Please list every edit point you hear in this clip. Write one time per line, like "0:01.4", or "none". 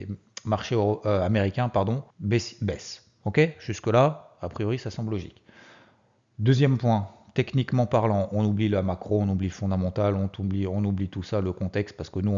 0:02.1